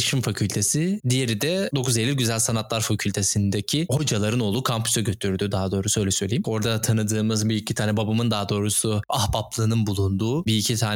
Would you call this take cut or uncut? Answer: cut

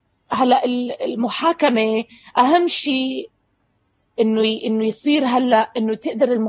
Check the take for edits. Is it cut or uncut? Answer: uncut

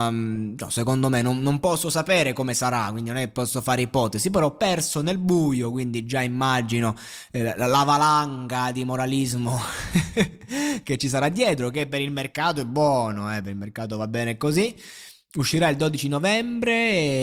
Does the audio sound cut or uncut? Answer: uncut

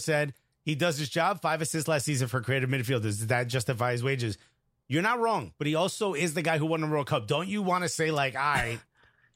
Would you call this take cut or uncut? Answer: uncut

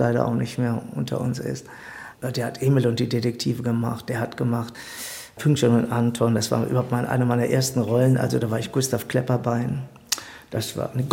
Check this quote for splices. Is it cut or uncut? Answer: cut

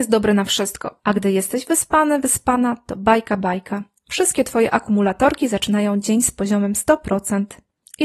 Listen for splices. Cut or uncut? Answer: cut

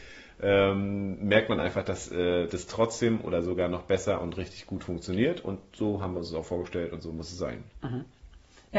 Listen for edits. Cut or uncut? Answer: uncut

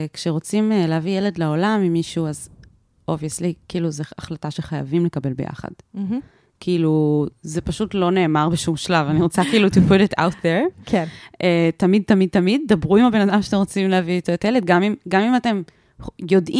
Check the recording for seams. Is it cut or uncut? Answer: uncut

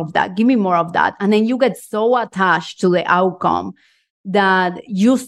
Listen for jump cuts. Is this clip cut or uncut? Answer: uncut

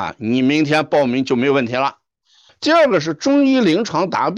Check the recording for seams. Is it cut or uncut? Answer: cut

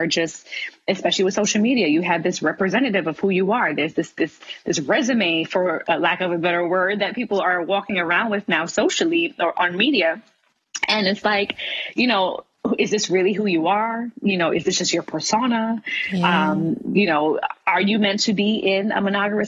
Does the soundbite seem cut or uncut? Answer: uncut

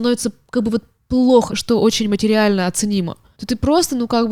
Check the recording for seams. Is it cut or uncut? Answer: cut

